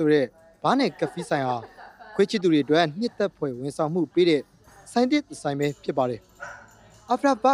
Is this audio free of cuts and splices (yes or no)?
yes